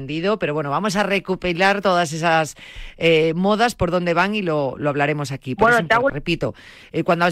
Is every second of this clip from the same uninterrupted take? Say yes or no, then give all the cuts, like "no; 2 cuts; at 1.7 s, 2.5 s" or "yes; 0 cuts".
no; 1 cut; at 6.1 s